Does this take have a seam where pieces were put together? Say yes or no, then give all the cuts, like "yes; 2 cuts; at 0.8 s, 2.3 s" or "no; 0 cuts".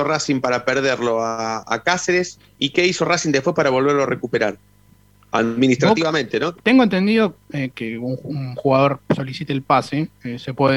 yes; 3 cuts; at 2.5 s, 6.5 s, 7.7 s